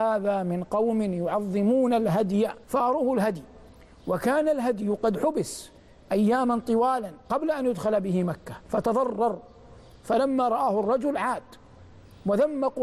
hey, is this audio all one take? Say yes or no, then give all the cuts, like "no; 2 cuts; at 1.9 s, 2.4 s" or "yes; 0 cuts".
no; 3 cuts; at 2.6 s, 7.2 s, 8.6 s